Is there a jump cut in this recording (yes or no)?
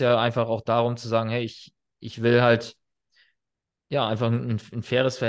no